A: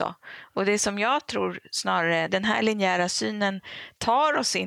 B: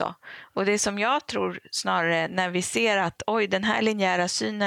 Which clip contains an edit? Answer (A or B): A